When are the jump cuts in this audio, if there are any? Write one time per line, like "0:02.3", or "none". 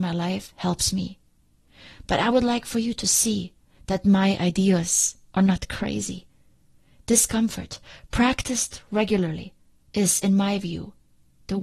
none

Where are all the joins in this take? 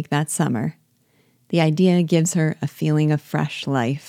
none

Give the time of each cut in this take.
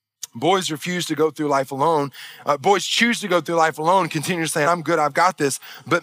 0:04.6

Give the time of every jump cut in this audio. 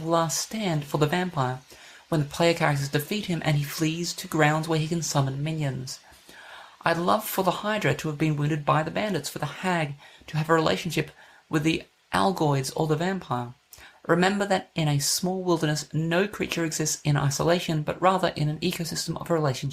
none

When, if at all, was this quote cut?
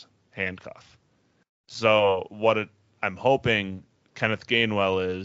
none

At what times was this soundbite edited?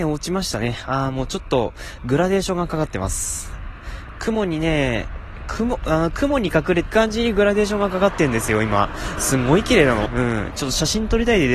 0:06.9
0:10.1

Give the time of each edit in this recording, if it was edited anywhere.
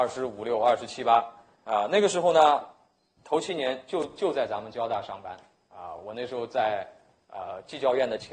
none

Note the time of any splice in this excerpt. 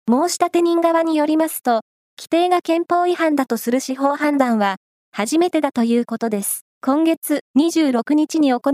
0:06.7

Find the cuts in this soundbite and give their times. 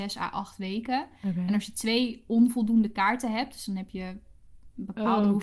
none

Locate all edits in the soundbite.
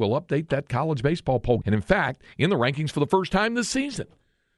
0:01.6

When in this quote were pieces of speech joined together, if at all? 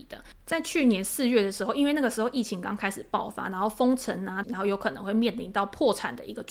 0:04.4

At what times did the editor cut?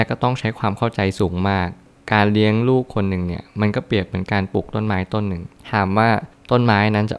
none

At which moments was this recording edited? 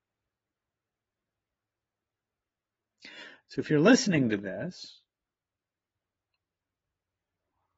0:03.4

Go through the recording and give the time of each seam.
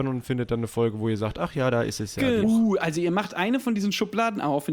0:02.4

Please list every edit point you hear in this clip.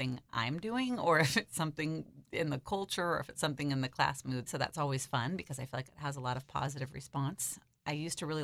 0:04.5

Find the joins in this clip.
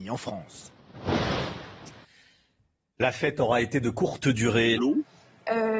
0:04.8

